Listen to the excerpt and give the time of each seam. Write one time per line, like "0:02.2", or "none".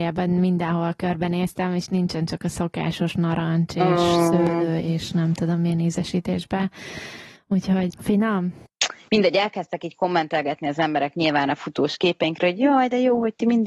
0:07.9
0:09.1